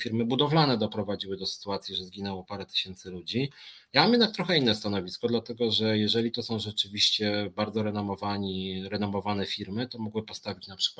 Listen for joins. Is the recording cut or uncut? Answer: uncut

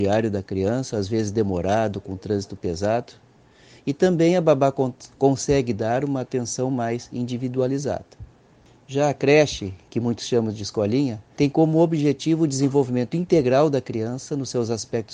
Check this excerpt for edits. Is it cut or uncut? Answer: uncut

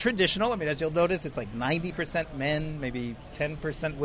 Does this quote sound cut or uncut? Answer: uncut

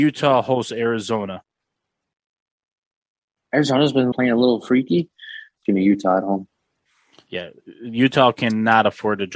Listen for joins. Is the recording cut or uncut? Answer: cut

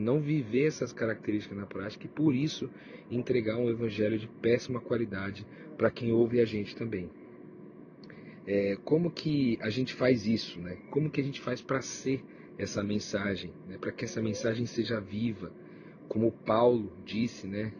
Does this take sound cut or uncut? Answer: uncut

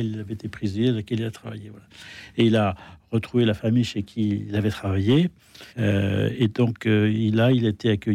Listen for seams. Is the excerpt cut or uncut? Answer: cut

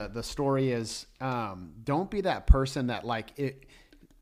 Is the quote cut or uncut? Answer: uncut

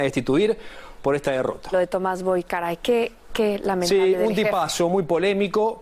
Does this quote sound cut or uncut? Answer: cut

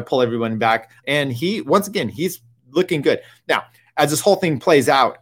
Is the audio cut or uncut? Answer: cut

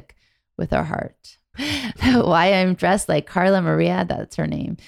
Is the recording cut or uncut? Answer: cut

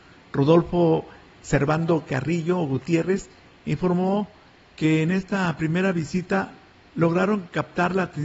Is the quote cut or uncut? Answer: uncut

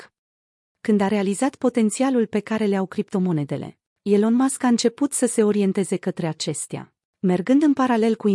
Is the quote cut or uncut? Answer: uncut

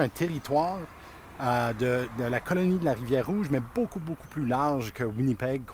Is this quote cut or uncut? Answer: uncut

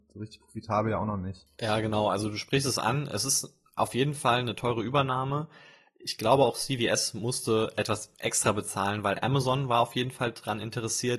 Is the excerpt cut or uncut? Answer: uncut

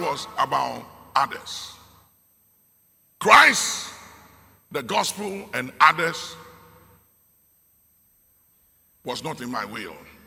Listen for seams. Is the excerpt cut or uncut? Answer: uncut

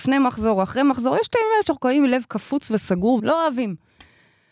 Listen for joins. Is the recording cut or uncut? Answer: cut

